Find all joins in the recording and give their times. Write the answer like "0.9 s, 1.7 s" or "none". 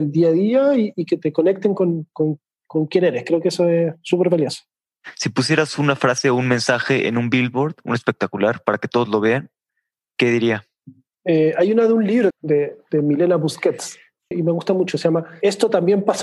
12.3 s, 14.3 s